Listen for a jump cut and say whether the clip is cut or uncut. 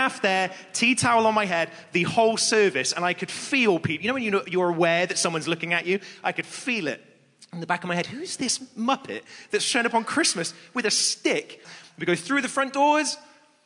cut